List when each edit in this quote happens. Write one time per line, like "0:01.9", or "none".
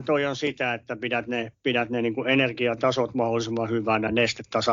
none